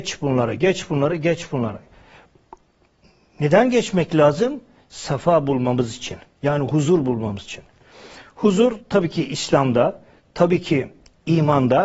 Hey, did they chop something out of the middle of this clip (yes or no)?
no